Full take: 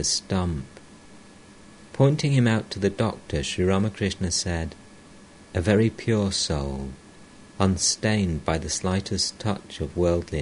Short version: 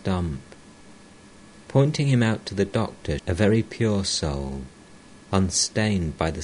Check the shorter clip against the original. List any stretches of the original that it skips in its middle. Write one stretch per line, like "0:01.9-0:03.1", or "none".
0:03.4-0:05.5